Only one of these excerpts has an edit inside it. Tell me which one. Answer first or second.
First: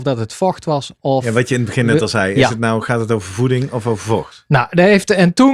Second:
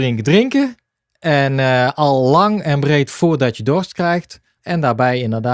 second